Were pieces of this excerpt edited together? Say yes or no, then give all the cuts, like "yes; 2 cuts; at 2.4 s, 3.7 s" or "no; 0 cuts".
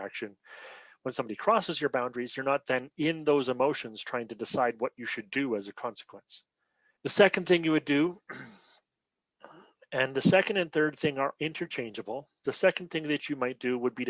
yes; 1 cut; at 7.0 s